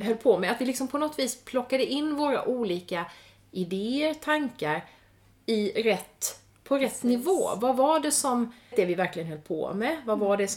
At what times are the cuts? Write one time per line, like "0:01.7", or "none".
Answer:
0:08.7